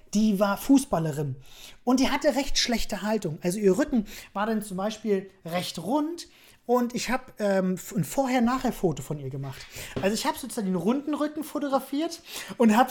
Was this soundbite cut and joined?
no; 0 cuts

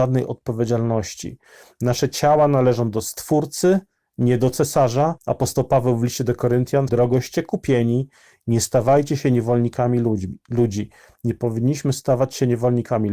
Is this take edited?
yes; 2 cuts; at 5.2 s, 6.9 s

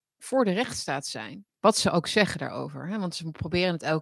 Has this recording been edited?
yes; 1 cut; at 1.5 s

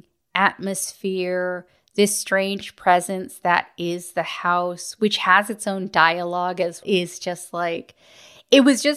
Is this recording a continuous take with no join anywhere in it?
no; 1 cut; at 6.8 s

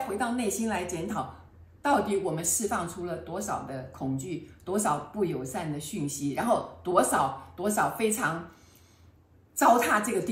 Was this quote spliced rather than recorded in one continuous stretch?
no; 0 cuts

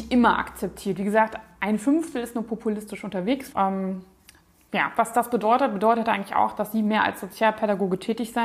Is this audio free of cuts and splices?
no; 1 cut; at 3.5 s

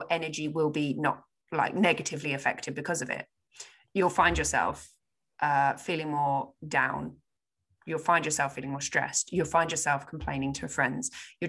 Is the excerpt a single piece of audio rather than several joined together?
yes; 0 cuts

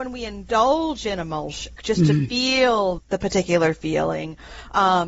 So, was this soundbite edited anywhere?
yes; 2 cuts; at 1.8 s, 3.0 s

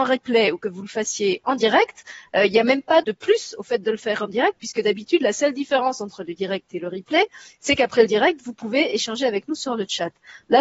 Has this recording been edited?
yes; 1 cut; at 3.0 s

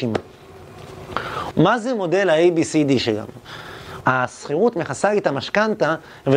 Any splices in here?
yes; 2 cuts; at 1.5 s, 4.0 s

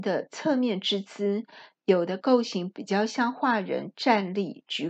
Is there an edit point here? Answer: no; 0 cuts

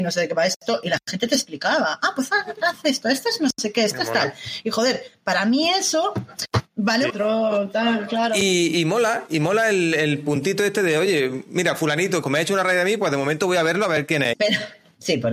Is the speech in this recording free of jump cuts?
no; 3 cuts; at 7.1 s, 12.2 s, 14.3 s

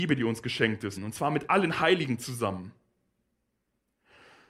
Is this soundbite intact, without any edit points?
no; 1 cut; at 1.0 s

